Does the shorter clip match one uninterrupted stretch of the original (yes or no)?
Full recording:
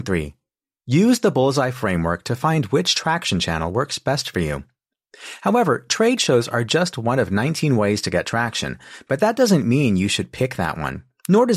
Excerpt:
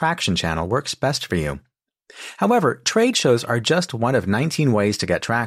yes